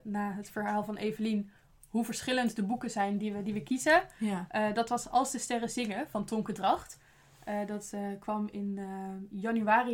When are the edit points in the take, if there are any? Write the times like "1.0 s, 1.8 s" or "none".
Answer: none